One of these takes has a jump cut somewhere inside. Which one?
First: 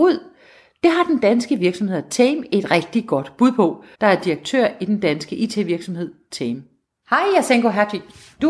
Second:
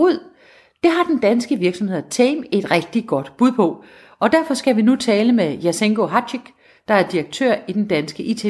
first; 1 cut; at 3.9 s

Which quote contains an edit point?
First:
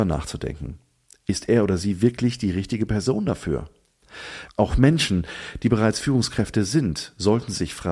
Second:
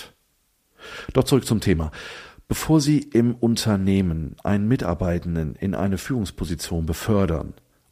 first; 1 cut; at 4.5 s

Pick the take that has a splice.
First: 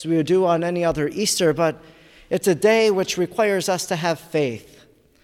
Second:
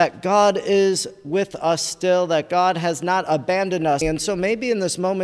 second; 1 cut; at 4.0 s

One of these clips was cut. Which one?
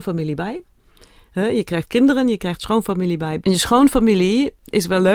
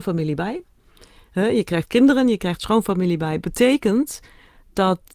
first; 1 cut; at 3.4 s

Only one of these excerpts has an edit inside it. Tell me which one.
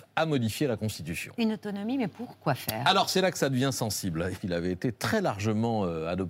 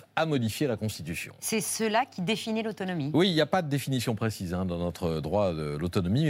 first; 2 cuts; at 1.3 s, 4.4 s

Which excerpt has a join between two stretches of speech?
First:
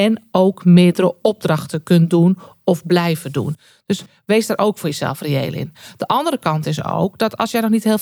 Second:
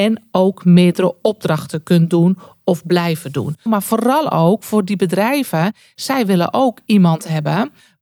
second; 1 cut; at 3.7 s

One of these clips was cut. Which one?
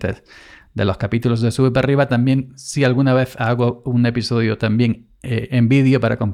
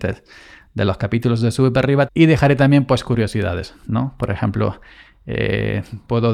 second; 1 cut; at 2.1 s

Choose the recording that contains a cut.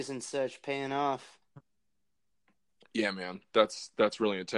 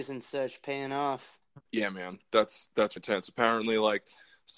second; 2 cuts; at 1.7 s, 3.0 s

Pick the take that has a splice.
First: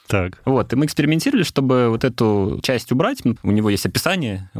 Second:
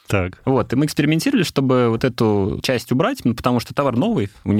first; 1 cut; at 3.4 s

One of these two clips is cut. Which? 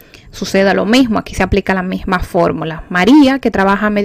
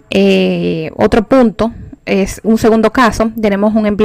second; 1 cut; at 2.4 s

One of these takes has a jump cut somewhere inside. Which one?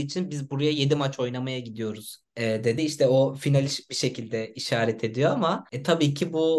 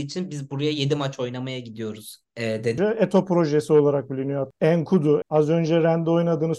second; 2 cuts; at 2.8 s, 5.2 s

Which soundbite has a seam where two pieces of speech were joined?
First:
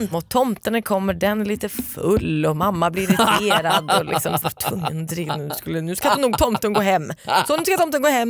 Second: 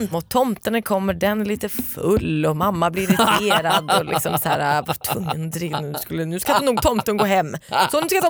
first; 1 cut; at 4.4 s

